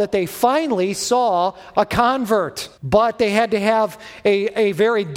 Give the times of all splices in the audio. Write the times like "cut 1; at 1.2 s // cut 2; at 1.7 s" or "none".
cut 1; at 2.8 s